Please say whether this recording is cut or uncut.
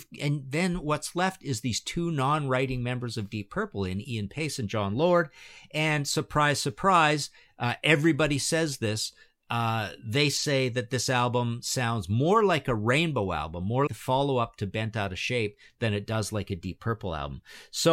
cut